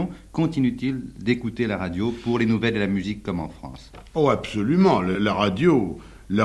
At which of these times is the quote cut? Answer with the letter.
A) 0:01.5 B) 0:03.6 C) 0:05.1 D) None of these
C